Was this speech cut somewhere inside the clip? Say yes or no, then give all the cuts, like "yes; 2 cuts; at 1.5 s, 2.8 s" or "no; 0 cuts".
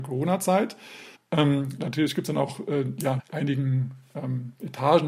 yes; 2 cuts; at 1.1 s, 3.2 s